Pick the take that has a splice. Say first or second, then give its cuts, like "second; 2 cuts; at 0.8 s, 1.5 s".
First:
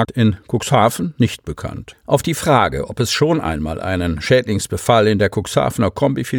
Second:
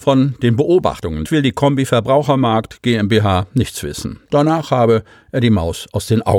second; 2 cuts; at 1.2 s, 4.2 s